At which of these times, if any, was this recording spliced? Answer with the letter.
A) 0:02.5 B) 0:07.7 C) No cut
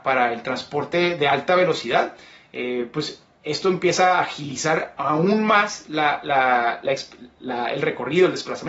C